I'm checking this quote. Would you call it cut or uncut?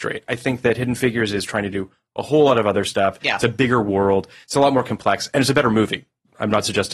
uncut